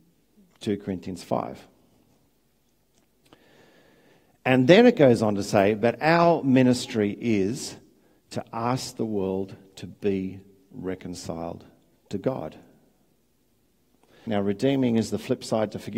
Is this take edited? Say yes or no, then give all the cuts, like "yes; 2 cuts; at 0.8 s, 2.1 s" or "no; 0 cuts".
yes; 1 cut; at 14.3 s